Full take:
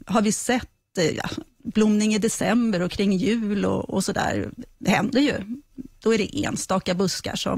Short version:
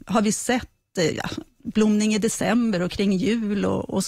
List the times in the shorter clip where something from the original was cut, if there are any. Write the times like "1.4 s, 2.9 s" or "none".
none

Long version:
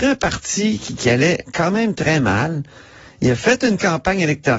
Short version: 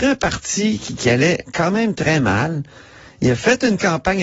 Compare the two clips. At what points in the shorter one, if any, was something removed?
none

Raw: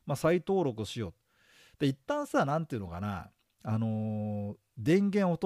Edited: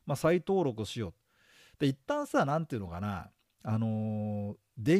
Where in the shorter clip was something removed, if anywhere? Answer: none

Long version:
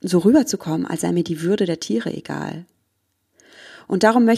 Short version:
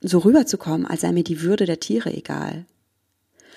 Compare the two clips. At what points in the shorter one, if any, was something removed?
none

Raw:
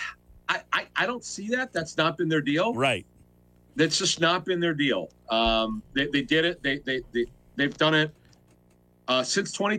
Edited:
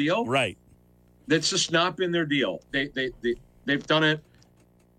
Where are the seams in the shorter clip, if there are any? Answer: 2.7 s

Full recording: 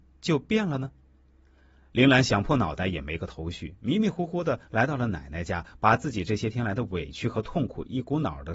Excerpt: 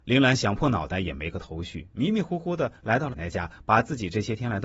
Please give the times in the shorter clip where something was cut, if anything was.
3.1 s

